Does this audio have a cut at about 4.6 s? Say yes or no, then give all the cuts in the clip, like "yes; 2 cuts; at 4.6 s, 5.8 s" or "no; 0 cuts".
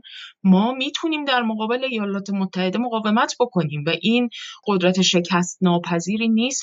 yes; 1 cut; at 4.6 s